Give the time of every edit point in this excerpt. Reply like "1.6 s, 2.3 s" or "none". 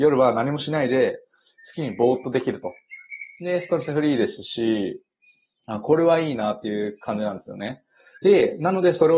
5.6 s, 8.2 s